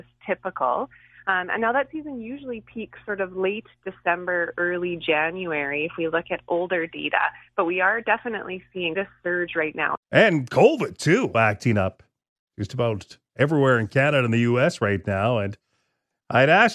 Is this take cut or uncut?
cut